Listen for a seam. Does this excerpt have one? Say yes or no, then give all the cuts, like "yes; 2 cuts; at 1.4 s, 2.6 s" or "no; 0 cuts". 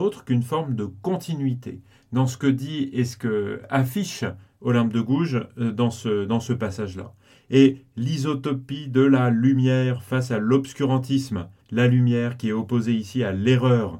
yes; 1 cut; at 11.6 s